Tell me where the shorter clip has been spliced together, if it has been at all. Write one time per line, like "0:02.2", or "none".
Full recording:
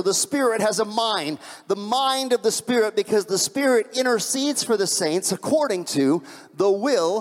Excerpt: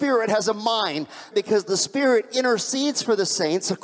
0:01.3